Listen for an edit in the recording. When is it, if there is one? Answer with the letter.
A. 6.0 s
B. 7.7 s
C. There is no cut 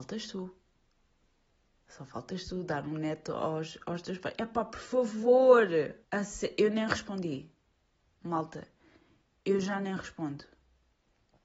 A